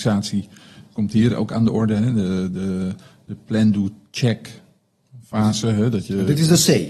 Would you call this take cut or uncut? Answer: uncut